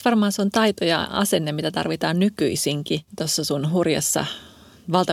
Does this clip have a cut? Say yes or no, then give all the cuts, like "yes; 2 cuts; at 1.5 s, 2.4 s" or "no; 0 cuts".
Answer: yes; 1 cut; at 3.1 s